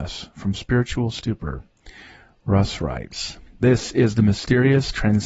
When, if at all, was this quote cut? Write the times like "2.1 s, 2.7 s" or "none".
none